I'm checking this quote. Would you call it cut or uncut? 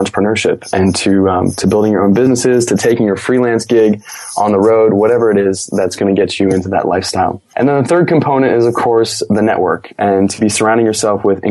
uncut